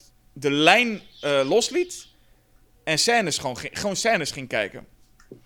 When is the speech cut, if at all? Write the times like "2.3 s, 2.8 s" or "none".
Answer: none